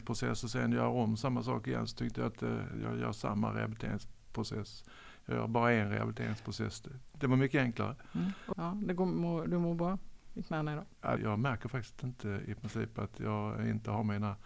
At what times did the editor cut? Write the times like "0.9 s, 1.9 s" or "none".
8.5 s, 11.2 s